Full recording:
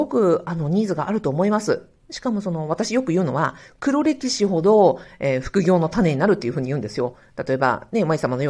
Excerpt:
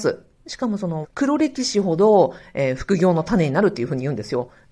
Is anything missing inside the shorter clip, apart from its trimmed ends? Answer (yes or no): yes